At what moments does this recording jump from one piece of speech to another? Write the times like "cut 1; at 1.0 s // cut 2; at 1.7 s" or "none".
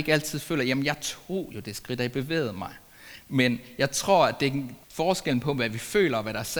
cut 1; at 4.8 s